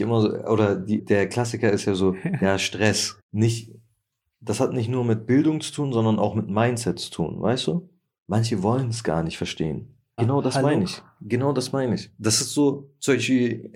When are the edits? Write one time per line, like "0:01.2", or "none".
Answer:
0:01.0
0:03.2
0:10.2